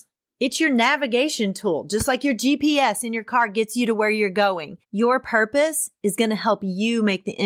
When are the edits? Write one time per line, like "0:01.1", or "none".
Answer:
0:04.8